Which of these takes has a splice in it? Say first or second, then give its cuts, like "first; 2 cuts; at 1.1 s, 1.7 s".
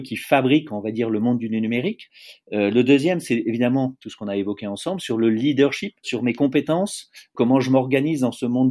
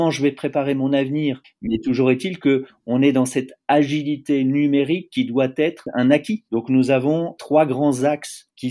second; 2 cuts; at 1.4 s, 6.5 s